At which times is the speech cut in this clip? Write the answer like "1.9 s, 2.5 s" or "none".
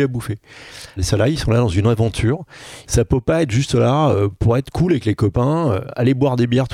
1.0 s, 2.8 s